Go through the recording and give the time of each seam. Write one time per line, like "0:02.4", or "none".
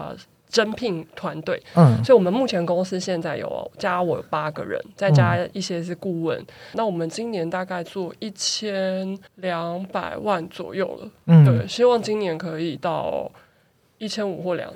0:06.7
0:09.3